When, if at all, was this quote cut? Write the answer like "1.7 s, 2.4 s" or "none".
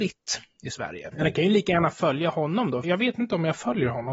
1.1 s, 2.8 s